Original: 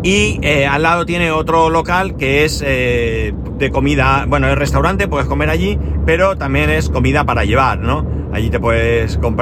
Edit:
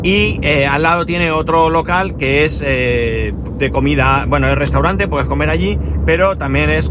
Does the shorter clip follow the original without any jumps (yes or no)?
yes